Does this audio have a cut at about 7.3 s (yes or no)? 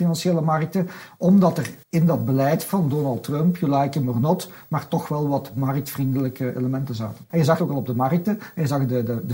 yes